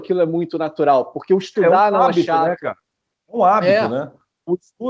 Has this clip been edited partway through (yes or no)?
no